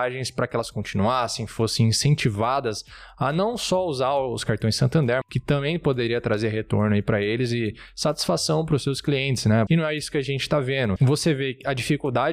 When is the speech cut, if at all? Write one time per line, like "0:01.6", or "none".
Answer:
0:05.2
0:09.7
0:11.0